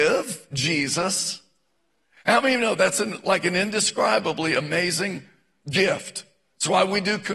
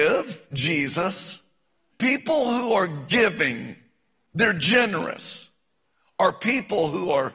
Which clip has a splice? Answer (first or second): second